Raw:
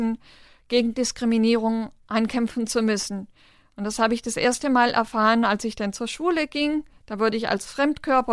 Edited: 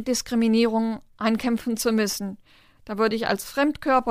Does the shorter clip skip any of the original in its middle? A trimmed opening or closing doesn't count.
yes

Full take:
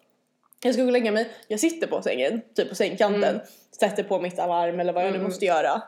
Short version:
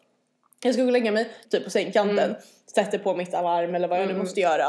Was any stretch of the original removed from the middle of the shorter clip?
yes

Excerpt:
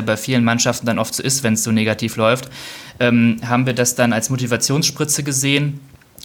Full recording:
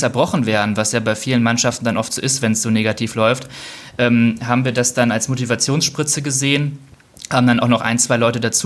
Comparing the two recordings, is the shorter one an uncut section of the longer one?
yes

